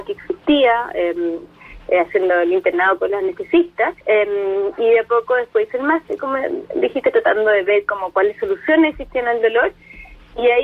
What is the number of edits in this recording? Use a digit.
1